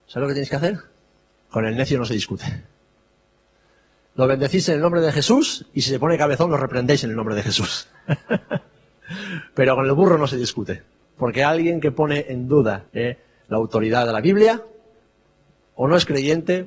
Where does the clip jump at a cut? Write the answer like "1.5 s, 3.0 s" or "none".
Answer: 1.5 s, 12.9 s